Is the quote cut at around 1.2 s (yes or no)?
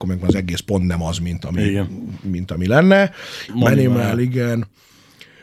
no